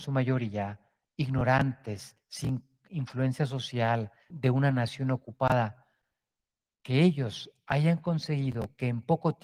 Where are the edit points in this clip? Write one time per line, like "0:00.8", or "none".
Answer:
0:04.3